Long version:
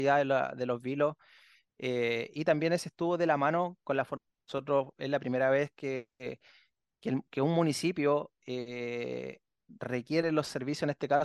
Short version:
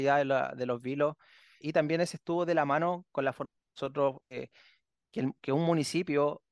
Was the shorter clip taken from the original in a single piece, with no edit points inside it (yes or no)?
no